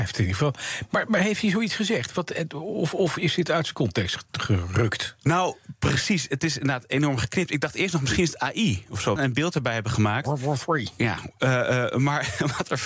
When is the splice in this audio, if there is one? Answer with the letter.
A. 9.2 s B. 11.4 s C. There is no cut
A